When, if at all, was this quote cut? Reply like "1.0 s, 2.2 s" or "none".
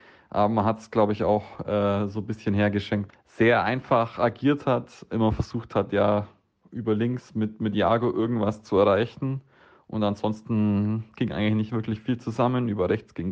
3.1 s